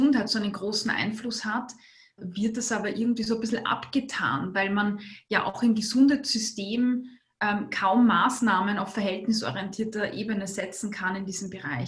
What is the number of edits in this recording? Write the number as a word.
one